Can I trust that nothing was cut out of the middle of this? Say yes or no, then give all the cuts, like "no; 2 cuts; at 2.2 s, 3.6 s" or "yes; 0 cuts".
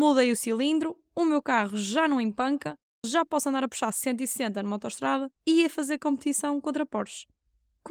no; 2 cuts; at 3.0 s, 5.4 s